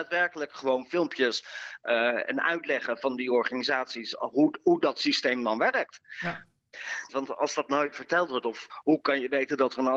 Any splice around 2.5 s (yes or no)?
no